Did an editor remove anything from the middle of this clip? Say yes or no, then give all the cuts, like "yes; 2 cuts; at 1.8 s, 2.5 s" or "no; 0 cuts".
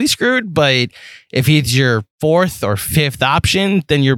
yes; 1 cut; at 2.1 s